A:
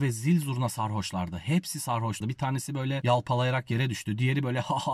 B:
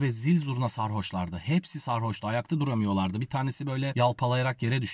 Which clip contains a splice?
A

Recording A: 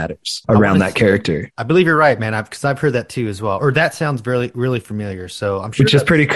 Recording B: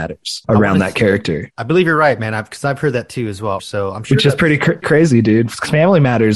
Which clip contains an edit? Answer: B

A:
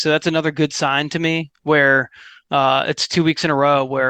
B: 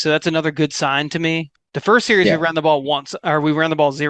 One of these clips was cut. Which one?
B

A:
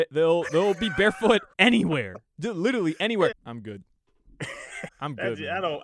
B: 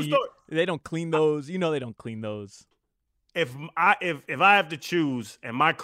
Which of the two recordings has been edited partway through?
A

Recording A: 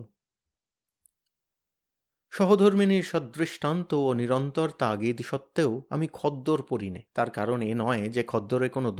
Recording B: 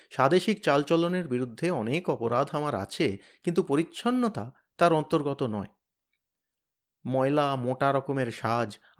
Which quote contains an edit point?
A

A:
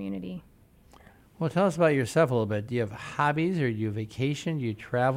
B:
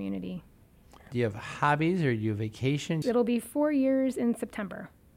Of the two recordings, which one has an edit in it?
B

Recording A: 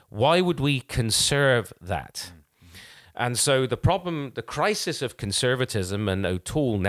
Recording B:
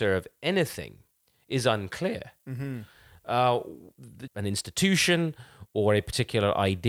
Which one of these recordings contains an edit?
B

